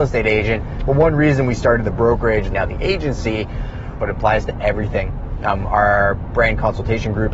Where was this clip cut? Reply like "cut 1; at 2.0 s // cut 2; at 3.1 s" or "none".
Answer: cut 1; at 2.5 s // cut 2; at 4.0 s